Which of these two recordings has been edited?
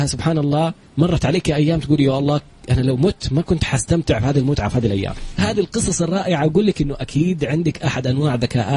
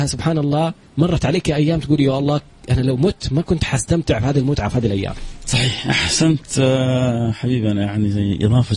first; 1 cut; at 5.4 s

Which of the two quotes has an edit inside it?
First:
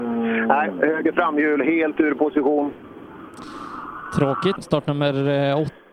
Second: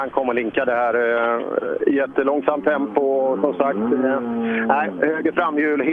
first; 1 cut; at 4.6 s

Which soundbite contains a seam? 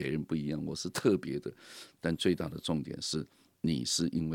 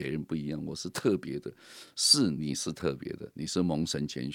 first; 1 cut; at 1.9 s

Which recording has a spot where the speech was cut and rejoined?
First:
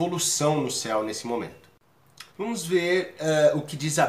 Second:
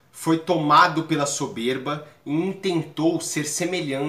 first; 1 cut; at 2.3 s

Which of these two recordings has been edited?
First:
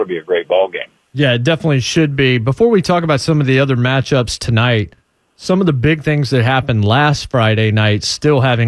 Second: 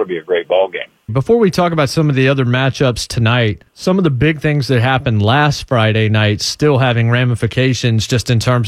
second; 2 cuts; at 1.1 s, 3.7 s

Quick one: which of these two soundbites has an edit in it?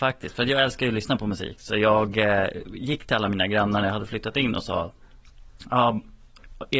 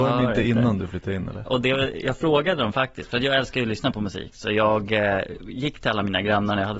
second; 1 cut; at 1.5 s

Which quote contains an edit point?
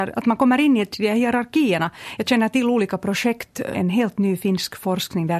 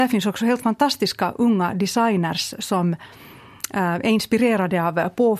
first; 3 cuts; at 0.9 s, 2.2 s, 3.7 s

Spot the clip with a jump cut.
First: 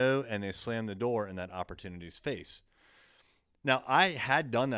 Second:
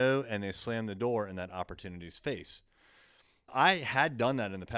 second; 1 cut; at 3.5 s

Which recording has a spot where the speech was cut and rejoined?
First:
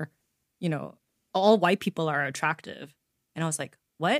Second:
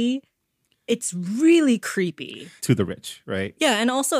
second; 1 cut; at 2.6 s

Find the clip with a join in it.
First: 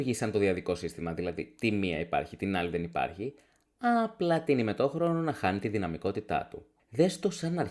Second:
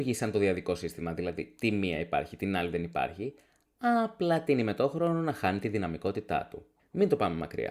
second; 1 cut; at 6.8 s

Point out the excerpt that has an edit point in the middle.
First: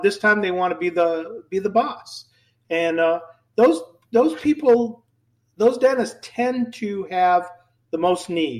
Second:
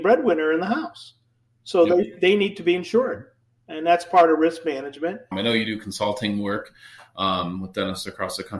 second; 1 cut; at 5.3 s

